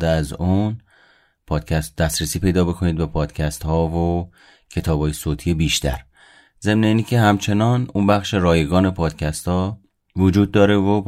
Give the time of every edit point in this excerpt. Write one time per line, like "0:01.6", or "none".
none